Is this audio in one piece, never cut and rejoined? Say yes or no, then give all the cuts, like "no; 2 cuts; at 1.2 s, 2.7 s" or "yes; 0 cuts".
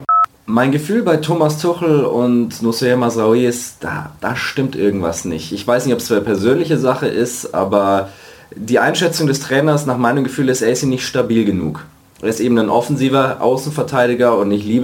yes; 0 cuts